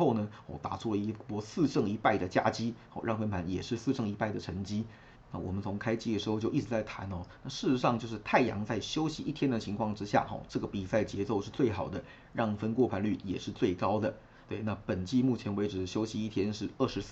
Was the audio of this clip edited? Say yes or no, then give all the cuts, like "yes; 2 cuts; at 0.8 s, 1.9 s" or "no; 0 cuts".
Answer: yes; 1 cut; at 5.1 s